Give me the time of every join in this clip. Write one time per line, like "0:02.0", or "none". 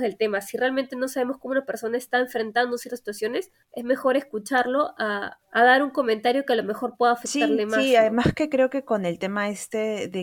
none